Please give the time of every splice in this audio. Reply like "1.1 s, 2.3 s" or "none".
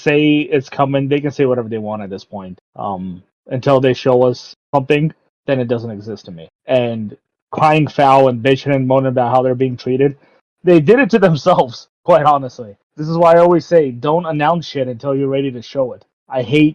none